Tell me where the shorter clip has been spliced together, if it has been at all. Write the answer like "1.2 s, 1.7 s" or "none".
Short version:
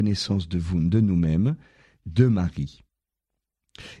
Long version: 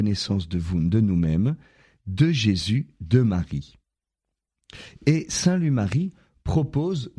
2.0 s